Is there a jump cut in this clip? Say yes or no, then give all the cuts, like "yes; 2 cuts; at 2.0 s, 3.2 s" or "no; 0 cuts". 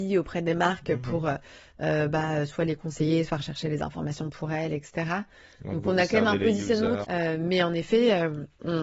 yes; 1 cut; at 7.0 s